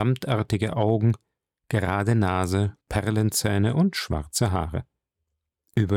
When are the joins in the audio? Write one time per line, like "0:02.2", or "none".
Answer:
0:01.6
0:02.8